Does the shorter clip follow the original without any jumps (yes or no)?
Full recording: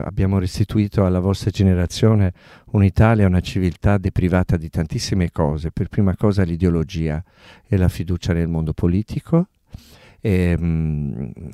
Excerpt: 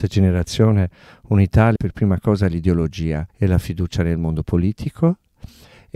no